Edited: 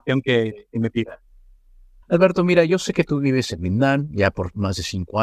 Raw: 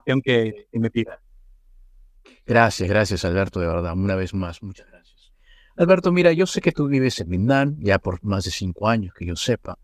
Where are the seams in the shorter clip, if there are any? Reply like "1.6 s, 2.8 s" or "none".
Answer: 2.0 s